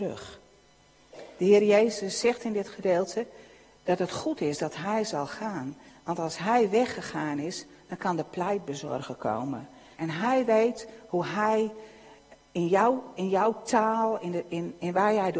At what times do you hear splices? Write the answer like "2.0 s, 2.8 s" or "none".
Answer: 9.9 s